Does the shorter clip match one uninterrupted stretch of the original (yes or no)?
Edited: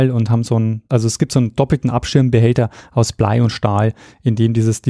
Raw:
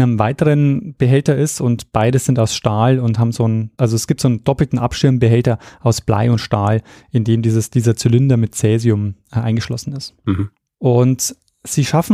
yes